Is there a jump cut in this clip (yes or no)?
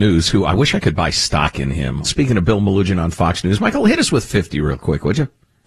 yes